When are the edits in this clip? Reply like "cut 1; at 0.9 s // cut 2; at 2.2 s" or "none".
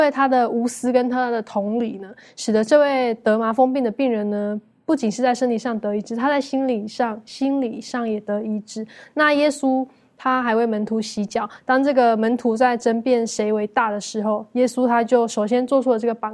none